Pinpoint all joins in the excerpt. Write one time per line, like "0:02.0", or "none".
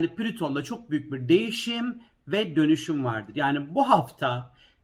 none

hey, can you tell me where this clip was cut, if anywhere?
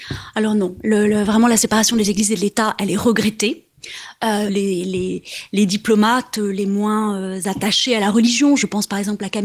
0:04.5

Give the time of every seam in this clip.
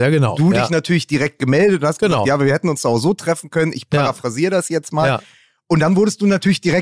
none

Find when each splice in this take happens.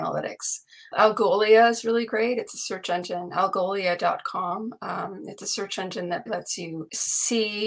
0:00.9
0:06.3

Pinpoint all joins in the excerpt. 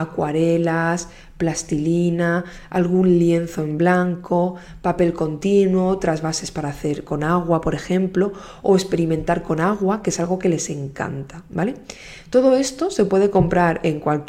none

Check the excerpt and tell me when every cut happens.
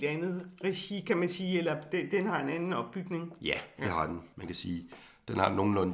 none

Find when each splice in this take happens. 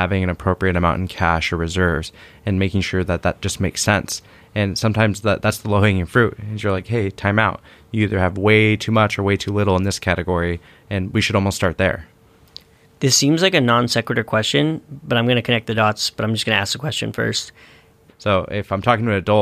0:18.1

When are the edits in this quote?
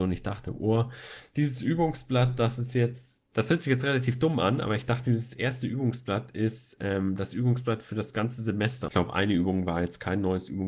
0:03.3
0:08.9

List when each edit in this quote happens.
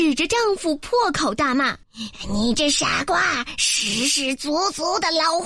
0:01.8

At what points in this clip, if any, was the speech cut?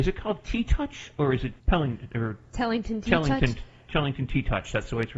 0:01.6

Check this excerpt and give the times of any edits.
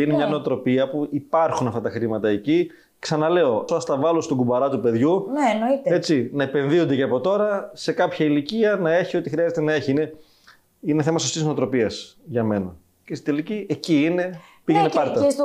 0:03.7

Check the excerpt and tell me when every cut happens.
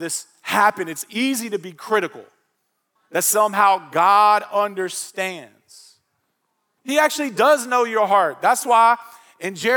0:03.0
0:06.8

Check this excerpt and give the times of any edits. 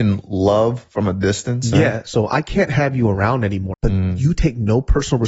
0:01.7
0:03.7

